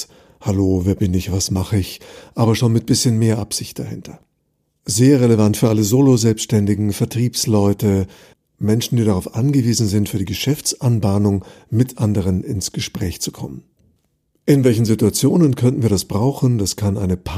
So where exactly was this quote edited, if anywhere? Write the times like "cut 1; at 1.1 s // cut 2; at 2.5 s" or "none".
none